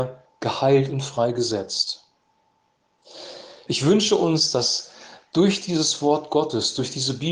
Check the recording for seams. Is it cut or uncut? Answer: cut